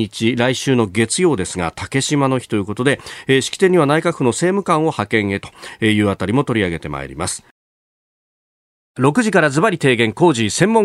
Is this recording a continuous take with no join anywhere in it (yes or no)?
yes